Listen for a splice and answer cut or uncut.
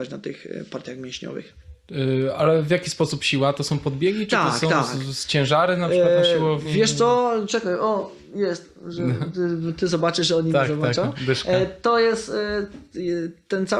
uncut